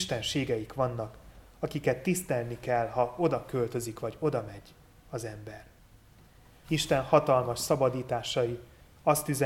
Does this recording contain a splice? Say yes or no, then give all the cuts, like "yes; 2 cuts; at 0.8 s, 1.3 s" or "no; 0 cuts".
yes; 1 cut; at 6.6 s